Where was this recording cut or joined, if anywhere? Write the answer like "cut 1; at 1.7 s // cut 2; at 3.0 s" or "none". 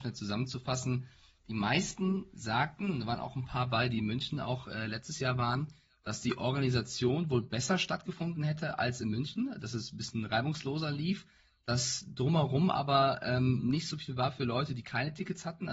none